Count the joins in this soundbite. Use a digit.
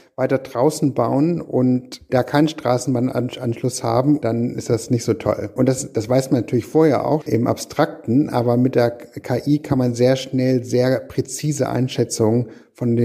1